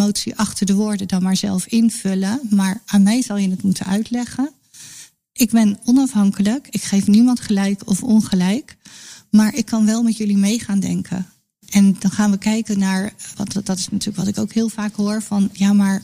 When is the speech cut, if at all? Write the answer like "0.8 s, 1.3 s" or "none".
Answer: none

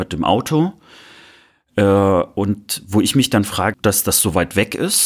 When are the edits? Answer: 3.7 s

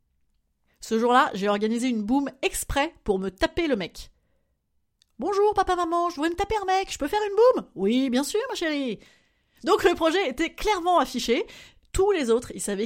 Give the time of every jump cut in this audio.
none

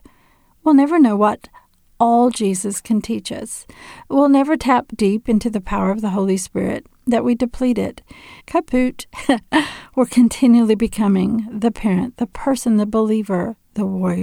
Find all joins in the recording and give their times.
4.9 s, 8.4 s

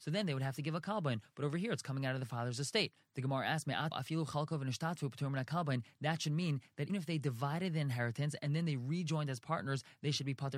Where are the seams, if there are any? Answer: 3.9 s, 6.9 s

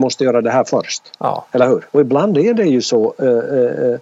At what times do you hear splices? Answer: 1.9 s

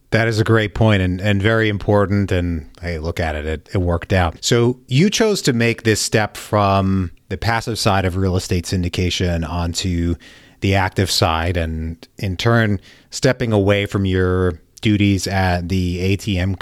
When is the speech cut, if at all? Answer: 3.6 s

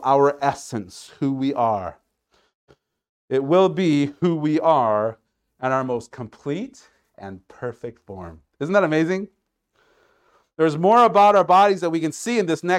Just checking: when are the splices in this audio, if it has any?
none

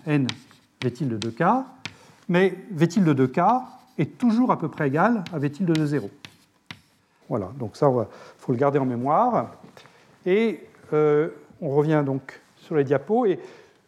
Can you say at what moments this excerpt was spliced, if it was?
7.2 s

